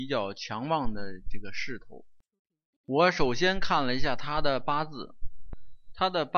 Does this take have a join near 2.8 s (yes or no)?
yes